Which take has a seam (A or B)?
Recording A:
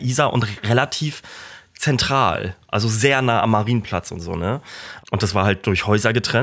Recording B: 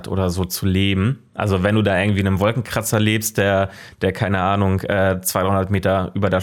A